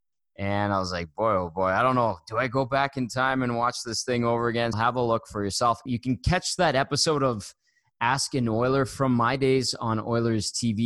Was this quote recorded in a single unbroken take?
no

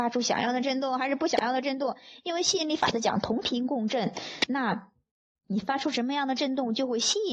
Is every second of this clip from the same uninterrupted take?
yes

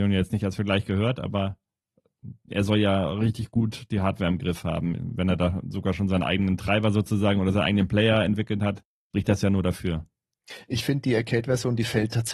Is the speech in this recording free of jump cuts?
yes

